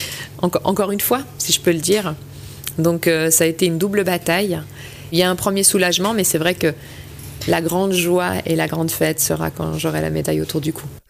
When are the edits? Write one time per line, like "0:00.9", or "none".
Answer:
none

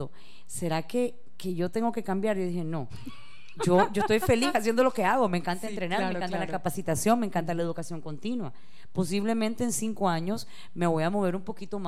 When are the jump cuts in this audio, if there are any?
none

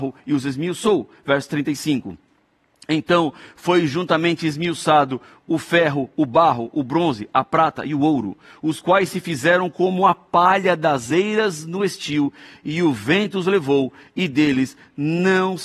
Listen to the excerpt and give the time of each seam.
none

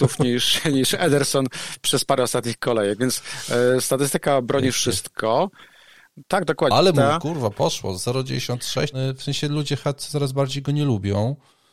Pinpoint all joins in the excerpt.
0:06.7
0:08.9

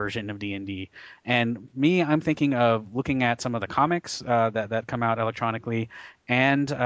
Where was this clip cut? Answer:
0:01.2

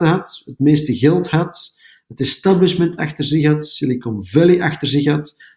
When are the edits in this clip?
none

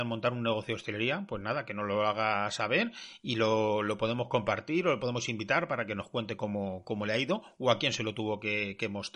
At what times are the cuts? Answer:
none

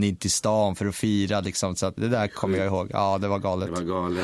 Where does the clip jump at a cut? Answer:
0:02.0

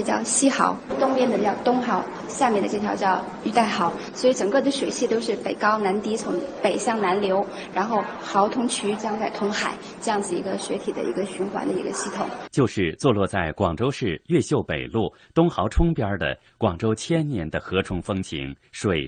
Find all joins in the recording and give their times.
0:09.0
0:12.5

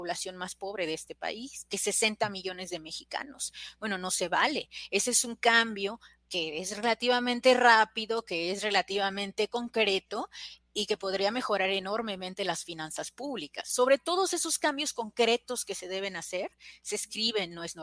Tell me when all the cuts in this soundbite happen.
none

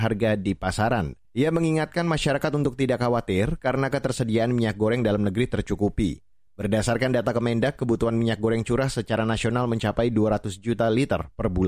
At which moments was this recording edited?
0:01.2

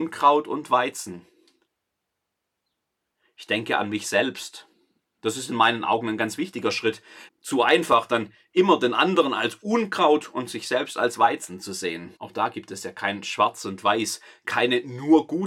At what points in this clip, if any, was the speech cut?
0:07.3
0:12.2

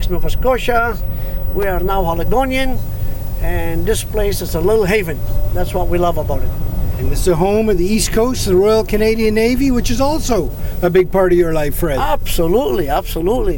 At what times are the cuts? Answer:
none

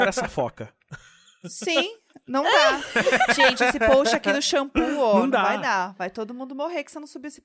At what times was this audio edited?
none

